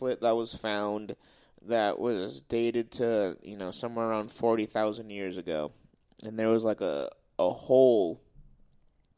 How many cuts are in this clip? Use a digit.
0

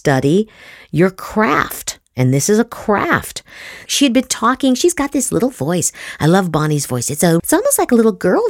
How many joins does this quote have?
2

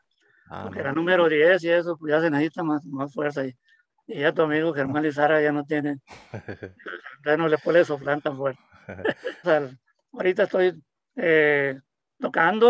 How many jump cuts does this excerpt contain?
1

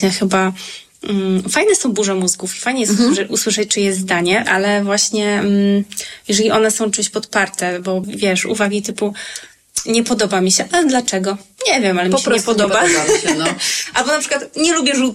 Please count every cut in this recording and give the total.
2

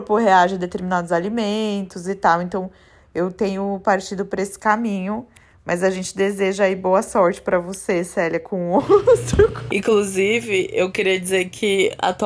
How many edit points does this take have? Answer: 1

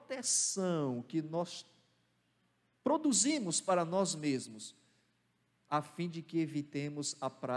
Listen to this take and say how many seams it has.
0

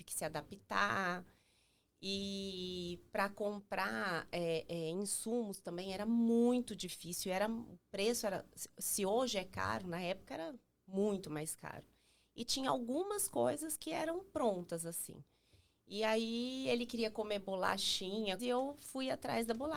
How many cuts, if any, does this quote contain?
1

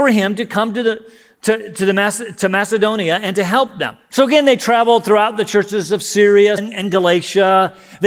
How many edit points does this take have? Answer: 2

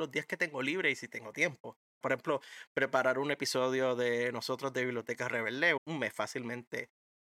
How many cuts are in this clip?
2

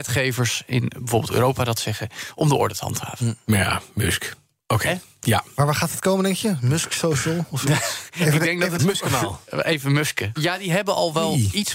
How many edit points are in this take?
2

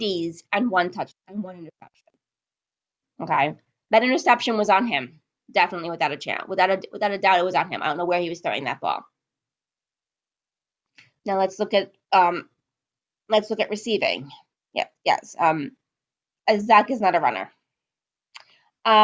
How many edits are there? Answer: 1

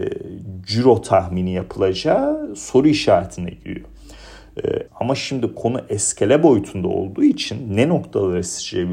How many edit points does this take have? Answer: 1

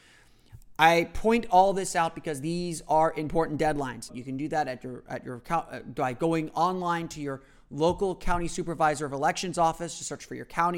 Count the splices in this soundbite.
1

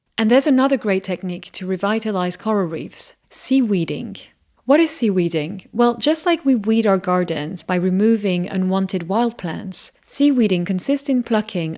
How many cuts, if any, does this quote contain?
0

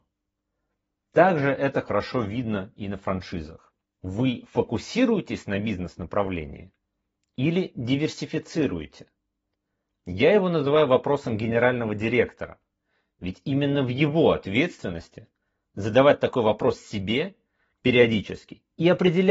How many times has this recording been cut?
1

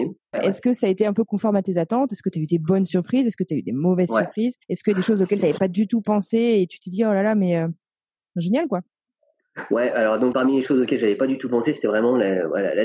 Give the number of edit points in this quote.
2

